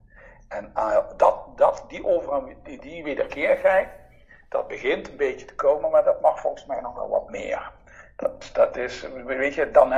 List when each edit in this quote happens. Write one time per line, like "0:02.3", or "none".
none

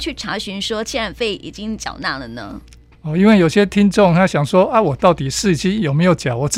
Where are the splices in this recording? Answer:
none

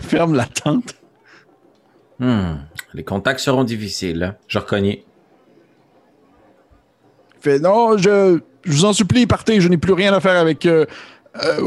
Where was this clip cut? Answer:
0:04.4

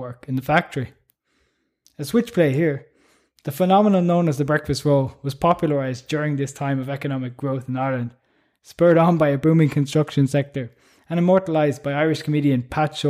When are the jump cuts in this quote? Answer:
none

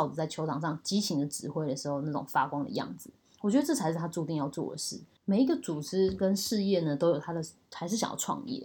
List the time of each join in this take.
0:05.2
0:07.7

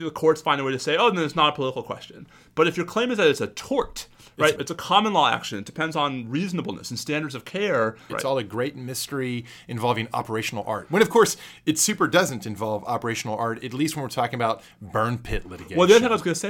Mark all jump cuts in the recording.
0:04.6
0:08.1

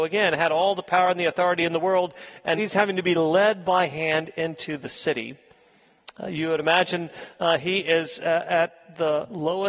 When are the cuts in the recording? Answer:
0:02.6

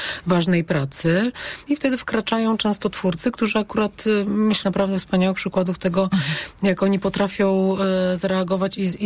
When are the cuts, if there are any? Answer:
0:01.7
0:04.6

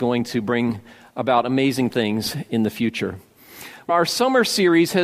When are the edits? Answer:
0:03.9

